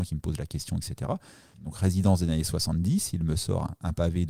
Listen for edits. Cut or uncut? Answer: cut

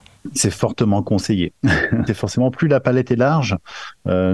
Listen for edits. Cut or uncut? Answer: cut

